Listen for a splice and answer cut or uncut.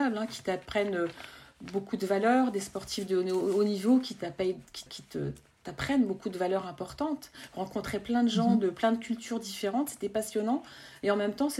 cut